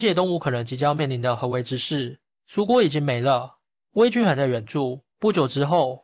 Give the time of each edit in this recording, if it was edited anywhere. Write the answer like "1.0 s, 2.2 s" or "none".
5.1 s